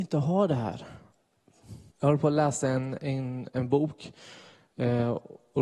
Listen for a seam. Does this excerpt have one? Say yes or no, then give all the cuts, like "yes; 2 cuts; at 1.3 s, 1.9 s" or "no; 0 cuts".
yes; 1 cut; at 1.9 s